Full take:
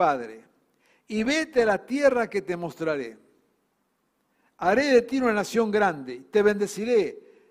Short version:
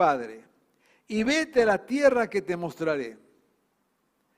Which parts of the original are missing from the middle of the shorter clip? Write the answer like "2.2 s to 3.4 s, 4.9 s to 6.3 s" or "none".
none